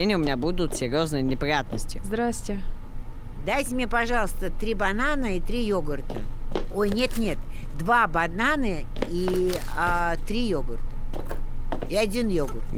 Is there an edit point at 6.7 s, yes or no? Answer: no